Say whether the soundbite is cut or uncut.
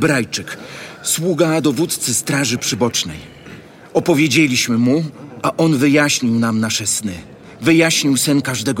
uncut